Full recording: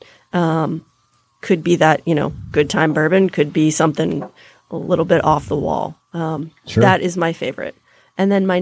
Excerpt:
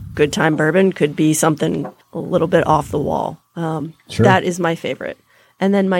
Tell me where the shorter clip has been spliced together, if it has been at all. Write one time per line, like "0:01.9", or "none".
0:02.0